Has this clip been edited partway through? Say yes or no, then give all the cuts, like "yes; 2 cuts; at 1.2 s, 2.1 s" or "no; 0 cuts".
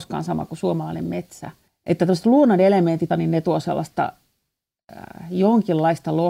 yes; 1 cut; at 3.1 s